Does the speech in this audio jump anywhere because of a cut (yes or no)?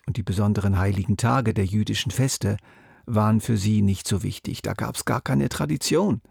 no